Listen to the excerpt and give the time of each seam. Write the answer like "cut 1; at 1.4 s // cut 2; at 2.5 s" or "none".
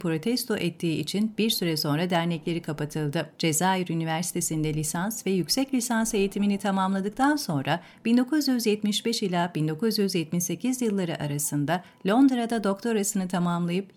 none